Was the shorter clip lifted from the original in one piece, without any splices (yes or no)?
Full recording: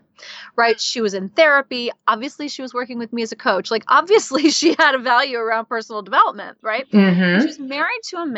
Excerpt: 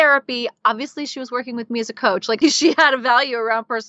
no